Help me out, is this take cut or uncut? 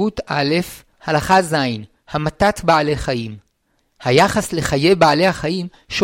cut